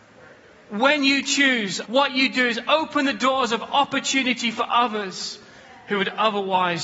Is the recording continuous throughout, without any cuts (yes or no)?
no